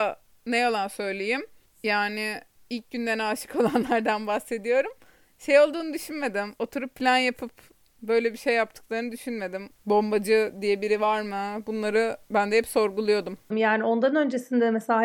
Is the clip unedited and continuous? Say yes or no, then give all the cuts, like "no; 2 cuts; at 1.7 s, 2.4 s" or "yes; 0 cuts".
no; 2 cuts; at 9.7 s, 13.5 s